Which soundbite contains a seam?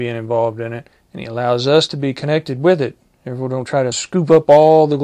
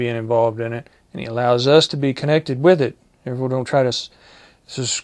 first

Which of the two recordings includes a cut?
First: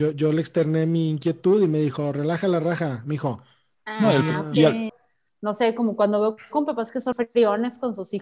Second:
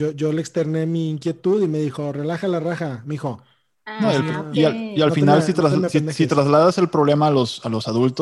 first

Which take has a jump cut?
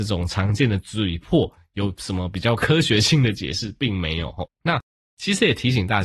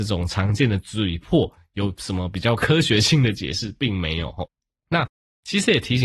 first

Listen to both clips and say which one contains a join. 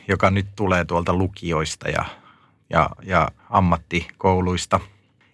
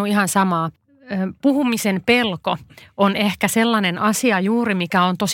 first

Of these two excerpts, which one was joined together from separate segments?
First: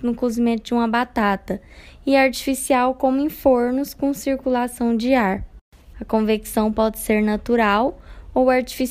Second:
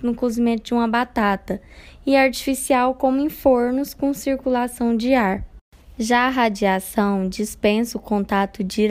first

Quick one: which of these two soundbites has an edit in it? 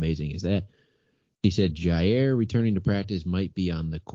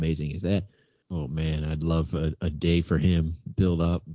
second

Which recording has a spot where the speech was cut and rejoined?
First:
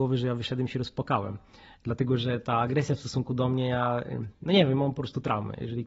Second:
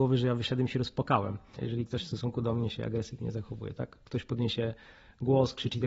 second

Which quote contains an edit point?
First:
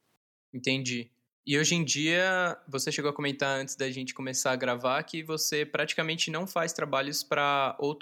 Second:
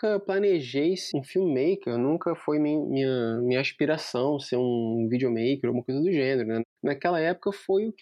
second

